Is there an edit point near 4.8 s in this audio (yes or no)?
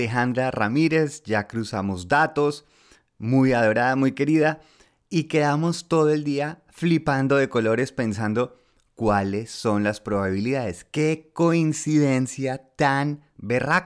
no